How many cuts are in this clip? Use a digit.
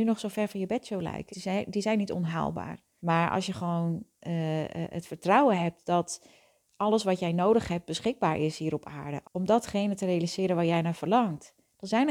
3